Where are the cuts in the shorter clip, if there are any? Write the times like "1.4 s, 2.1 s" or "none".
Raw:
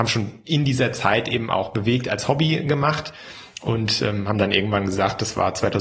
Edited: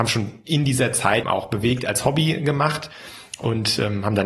1.2 s